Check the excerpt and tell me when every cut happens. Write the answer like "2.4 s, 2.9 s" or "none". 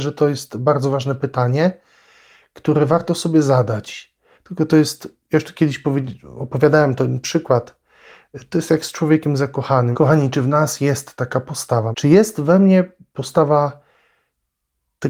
4.4 s, 9.9 s, 11.9 s